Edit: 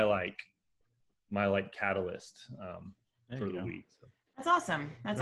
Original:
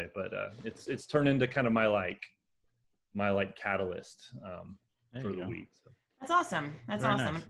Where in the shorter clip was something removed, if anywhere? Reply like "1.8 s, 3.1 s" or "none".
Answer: none